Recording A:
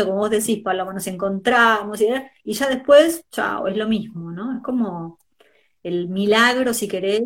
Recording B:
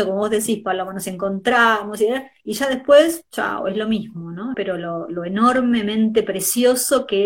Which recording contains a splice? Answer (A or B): B